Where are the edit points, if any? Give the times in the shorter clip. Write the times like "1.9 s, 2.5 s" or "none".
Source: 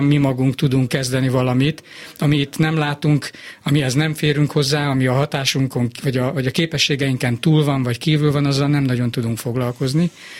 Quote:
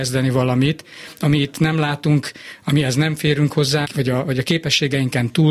3.8 s